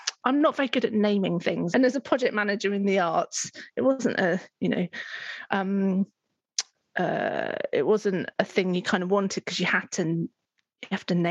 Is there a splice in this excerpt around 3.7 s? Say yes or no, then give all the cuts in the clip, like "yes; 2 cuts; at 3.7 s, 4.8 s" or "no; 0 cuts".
no; 1 cut; at 1.7 s